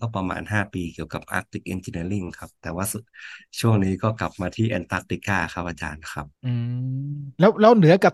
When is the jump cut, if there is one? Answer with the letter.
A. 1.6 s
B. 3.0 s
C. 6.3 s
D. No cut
C